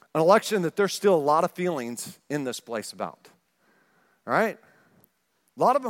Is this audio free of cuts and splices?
yes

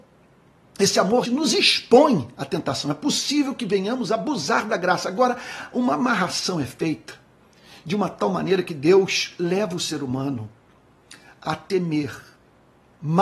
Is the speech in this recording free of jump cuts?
no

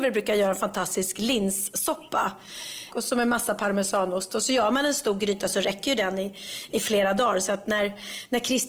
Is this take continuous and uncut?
no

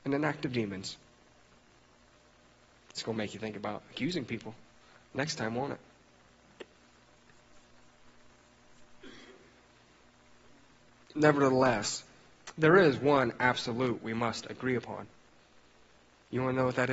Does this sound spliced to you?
no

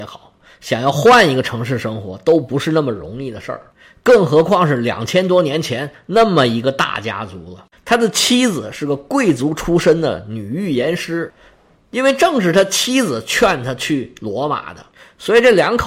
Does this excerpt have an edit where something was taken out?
yes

